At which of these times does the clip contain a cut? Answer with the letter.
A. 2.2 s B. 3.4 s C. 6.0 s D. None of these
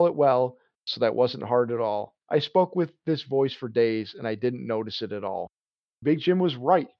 C